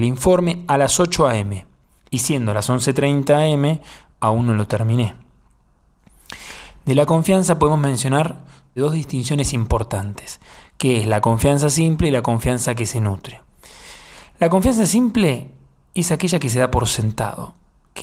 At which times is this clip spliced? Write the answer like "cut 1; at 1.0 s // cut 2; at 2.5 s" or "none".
none